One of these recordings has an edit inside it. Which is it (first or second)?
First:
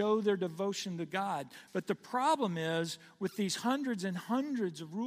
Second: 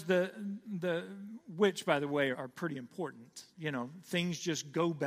second